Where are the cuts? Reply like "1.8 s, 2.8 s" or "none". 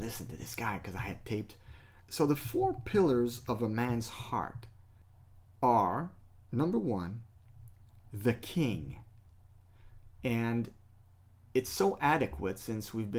2.0 s, 10.2 s